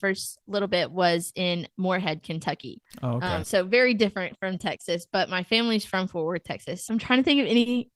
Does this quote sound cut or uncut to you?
cut